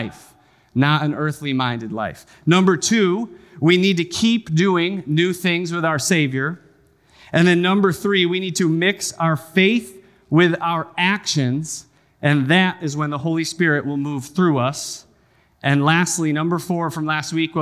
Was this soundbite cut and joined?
no; 0 cuts

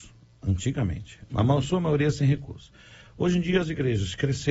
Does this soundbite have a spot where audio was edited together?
no; 0 cuts

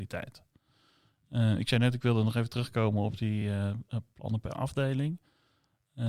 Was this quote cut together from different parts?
no; 0 cuts

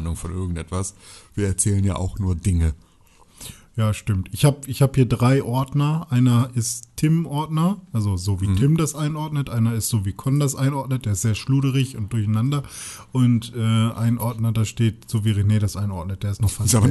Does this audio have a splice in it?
no; 0 cuts

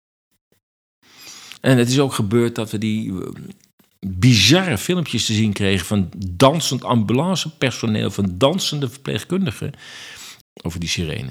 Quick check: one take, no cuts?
no; 2 cuts; at 1.6 s, 10.4 s

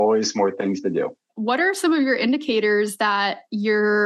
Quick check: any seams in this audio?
yes; 1 cut; at 1.3 s

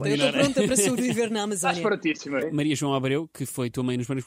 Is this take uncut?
no; 1 cut; at 2.4 s

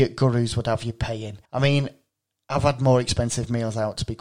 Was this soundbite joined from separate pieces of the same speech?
yes; 1 cut; at 1.5 s

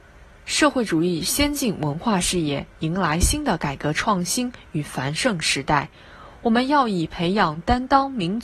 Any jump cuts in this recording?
no; 0 cuts

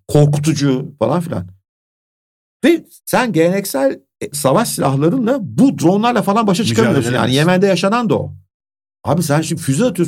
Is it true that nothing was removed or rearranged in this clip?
no; 1 cut; at 4.3 s

